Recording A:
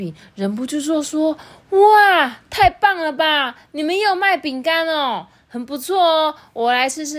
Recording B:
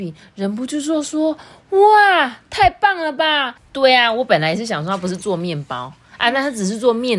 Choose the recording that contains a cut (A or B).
B